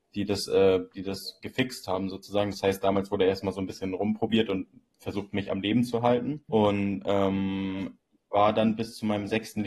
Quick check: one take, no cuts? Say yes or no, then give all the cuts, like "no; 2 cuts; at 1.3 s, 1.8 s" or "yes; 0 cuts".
no; 1 cut; at 6.5 s